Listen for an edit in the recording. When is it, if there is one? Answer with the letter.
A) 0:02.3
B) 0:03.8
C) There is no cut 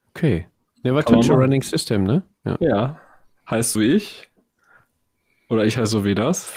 B